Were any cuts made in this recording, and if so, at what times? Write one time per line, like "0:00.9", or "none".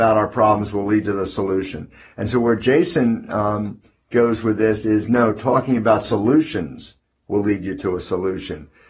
none